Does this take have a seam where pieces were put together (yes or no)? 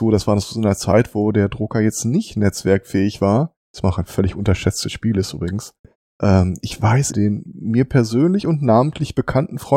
yes